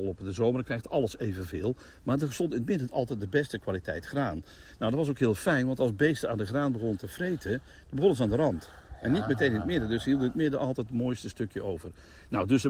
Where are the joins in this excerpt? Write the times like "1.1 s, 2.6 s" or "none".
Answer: none